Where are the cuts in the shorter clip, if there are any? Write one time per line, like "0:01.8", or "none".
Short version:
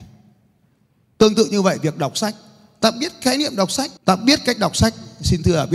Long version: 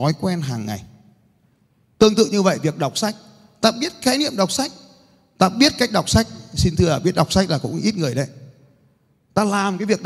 0:04.0